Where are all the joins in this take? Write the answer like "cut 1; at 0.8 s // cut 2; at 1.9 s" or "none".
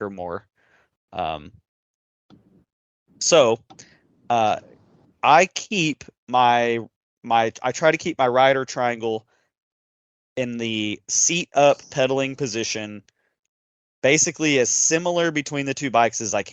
none